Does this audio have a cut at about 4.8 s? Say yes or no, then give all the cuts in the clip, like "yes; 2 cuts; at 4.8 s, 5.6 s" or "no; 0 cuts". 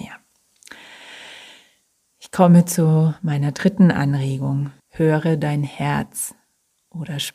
yes; 1 cut; at 4.8 s